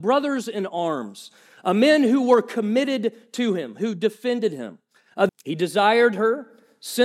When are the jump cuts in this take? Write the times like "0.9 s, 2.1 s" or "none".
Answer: 5.3 s